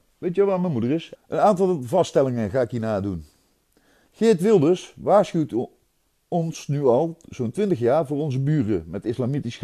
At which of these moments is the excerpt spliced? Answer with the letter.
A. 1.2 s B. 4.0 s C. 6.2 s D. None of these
A